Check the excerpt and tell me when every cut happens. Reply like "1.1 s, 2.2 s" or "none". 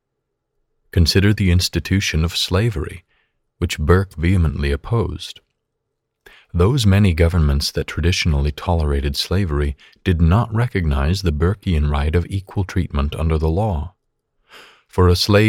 none

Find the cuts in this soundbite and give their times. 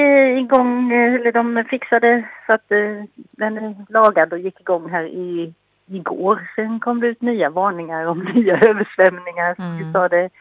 none

